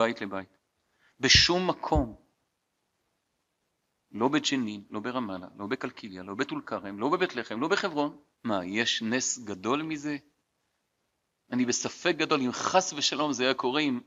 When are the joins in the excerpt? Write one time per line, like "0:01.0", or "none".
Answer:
0:04.9
0:08.3